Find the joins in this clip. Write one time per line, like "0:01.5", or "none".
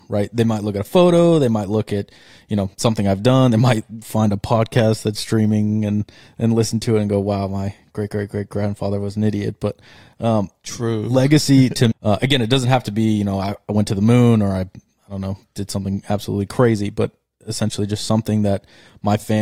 0:11.9